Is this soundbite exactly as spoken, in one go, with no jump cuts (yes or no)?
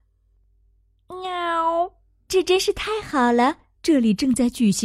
no